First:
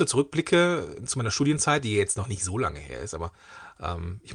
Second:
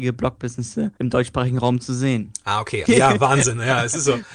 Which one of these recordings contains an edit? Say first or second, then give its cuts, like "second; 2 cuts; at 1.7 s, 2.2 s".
second; 2 cuts; at 1.0 s, 2.8 s